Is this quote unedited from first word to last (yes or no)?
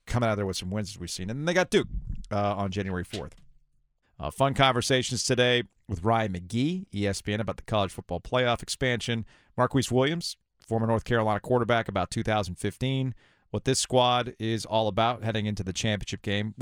no